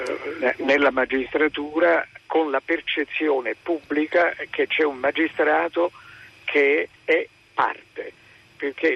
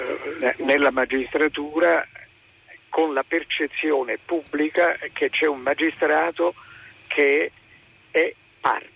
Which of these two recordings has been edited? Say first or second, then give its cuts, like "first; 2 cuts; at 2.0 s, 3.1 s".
first; 2 cuts; at 2.2 s, 7.0 s